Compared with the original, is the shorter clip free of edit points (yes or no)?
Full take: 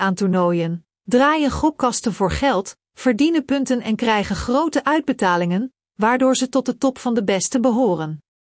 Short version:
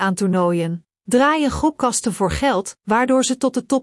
no